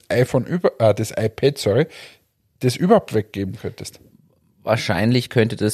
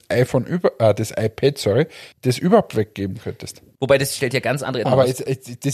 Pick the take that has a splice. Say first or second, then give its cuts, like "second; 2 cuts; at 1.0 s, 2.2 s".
second; 3 cuts; at 2.1 s, 3.8 s, 4.8 s